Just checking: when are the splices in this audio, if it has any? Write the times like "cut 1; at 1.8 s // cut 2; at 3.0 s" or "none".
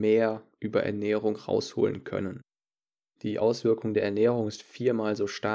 cut 1; at 3.2 s